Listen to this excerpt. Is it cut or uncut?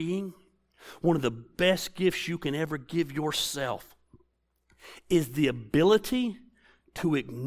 uncut